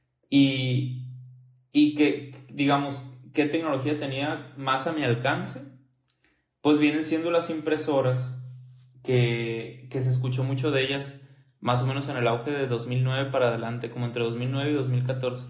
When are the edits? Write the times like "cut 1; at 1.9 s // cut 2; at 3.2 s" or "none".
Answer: none